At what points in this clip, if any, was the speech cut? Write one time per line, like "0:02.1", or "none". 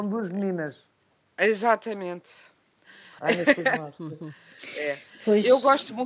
0:03.2